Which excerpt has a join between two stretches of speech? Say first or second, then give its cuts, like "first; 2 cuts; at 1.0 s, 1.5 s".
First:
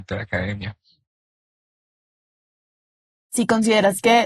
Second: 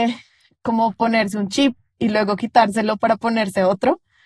first; 1 cut; at 3.2 s